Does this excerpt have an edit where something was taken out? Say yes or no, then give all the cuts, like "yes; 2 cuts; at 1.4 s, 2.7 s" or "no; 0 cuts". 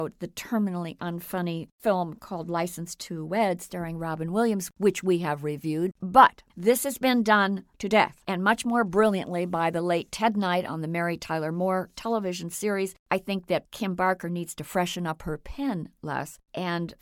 yes; 1 cut; at 5.9 s